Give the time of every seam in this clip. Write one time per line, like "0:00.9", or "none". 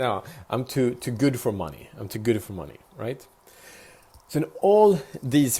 none